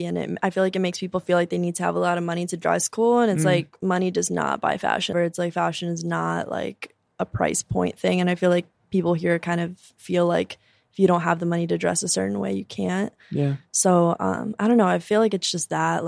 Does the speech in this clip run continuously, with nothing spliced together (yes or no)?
no